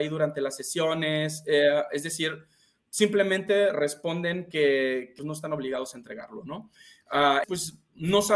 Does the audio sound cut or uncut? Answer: cut